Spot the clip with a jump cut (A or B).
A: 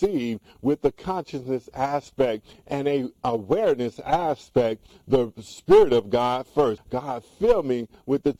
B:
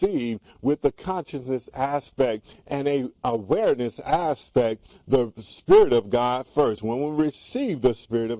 A